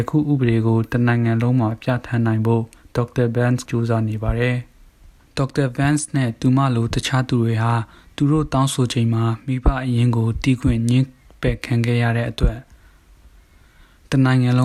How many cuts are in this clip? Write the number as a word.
one